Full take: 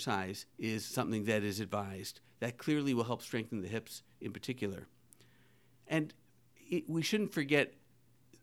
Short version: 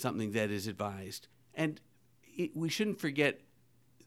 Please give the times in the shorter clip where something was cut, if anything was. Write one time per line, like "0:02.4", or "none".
0:01.3